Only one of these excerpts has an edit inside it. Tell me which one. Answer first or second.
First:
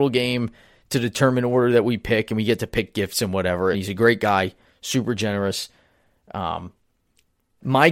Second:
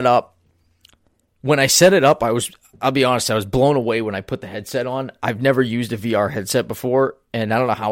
first